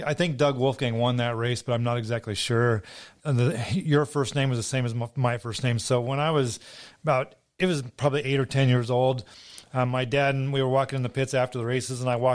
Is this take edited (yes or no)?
yes